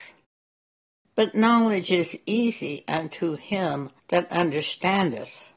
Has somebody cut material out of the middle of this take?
yes; 2 cuts; at 1.0 s, 4.0 s

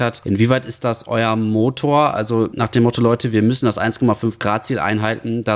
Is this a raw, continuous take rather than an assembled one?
yes; 0 cuts

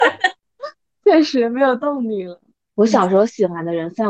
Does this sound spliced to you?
yes; 1 cut; at 2.7 s

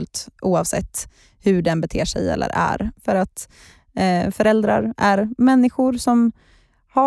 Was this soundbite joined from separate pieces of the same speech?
yes; 1 cut; at 2.9 s

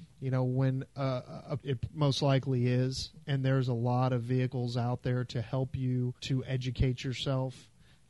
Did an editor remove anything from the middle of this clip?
yes; 2 cuts; at 1.6 s, 6.2 s

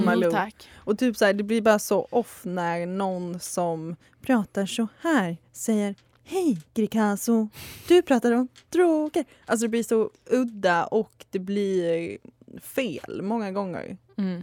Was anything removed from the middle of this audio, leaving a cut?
no; 0 cuts

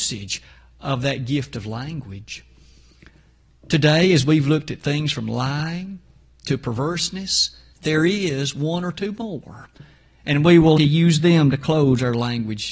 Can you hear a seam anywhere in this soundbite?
yes; 2 cuts; at 7.7 s, 10.8 s

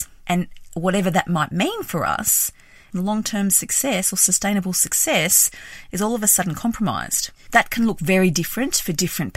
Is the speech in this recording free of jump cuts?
no; 2 cuts; at 2.9 s, 7.5 s

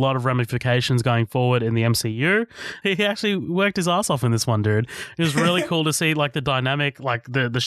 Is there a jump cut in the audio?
yes; 1 cut; at 2.8 s

